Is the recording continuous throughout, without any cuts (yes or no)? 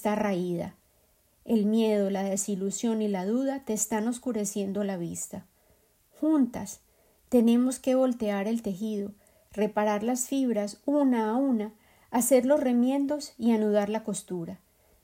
yes